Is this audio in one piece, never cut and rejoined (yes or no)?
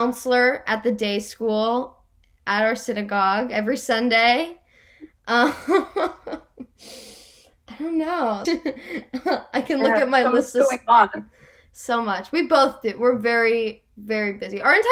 no